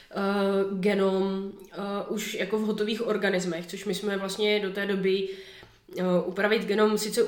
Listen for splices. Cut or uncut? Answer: uncut